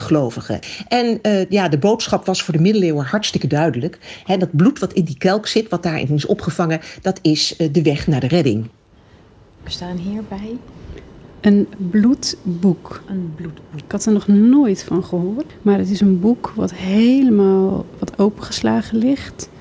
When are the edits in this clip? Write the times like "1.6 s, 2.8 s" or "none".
none